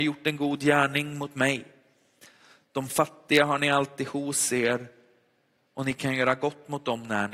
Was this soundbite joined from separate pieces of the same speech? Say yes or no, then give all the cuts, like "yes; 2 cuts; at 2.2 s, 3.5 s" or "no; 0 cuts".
no; 0 cuts